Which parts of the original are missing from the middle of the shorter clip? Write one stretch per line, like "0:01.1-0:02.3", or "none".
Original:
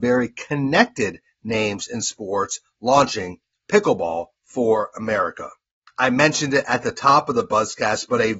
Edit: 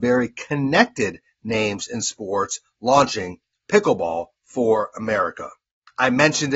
none